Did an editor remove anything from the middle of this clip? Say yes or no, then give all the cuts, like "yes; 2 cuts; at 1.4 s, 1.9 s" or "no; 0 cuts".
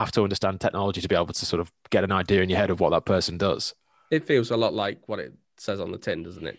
no; 0 cuts